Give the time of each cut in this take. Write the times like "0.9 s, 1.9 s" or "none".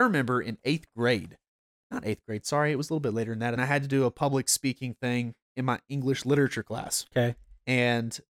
3.6 s